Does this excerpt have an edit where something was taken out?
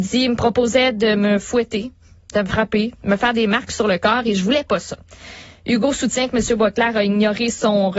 no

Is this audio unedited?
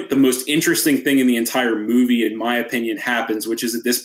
yes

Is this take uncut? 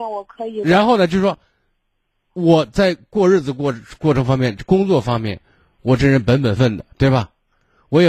no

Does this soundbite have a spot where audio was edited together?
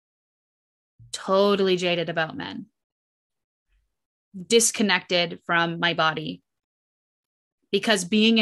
no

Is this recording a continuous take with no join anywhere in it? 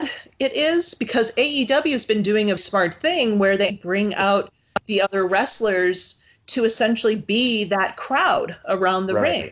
no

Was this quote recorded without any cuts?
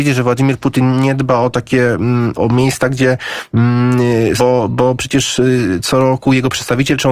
no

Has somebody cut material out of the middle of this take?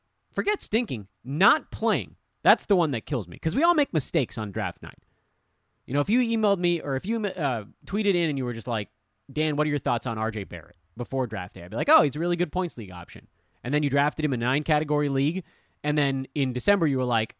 no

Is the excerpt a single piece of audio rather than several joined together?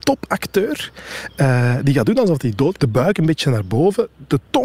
no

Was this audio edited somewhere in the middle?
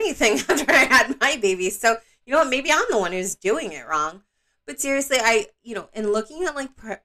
no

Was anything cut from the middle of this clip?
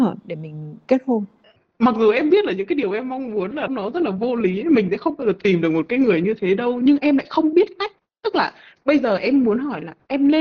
yes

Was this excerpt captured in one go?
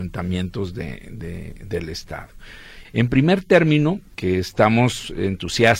no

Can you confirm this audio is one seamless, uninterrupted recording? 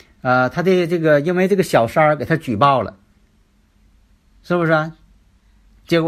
yes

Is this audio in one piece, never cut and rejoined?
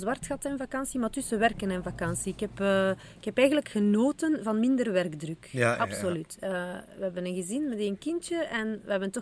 yes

